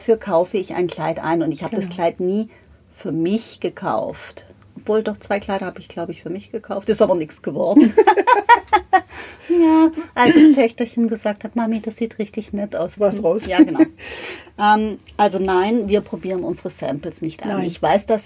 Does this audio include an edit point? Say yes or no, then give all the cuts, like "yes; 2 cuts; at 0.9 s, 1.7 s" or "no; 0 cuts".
yes; 1 cut; at 13.0 s